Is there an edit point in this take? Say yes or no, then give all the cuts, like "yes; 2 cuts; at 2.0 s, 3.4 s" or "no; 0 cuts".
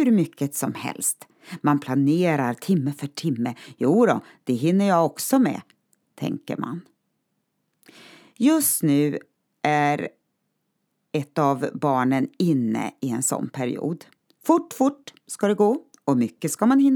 no; 0 cuts